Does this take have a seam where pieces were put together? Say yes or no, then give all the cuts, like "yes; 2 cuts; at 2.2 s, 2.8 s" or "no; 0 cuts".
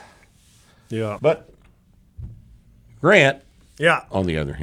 yes; 1 cut; at 1.2 s